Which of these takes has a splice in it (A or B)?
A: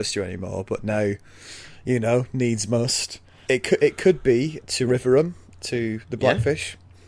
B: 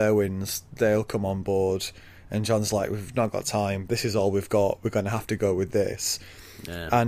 A